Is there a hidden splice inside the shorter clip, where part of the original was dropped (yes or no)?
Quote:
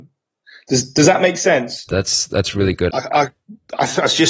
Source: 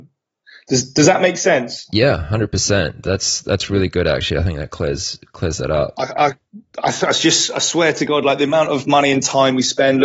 yes